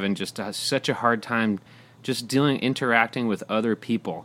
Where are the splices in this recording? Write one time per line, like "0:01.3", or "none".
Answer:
none